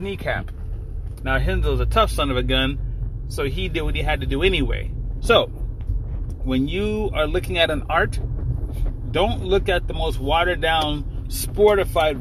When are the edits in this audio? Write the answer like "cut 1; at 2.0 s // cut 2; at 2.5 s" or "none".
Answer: cut 1; at 5.2 s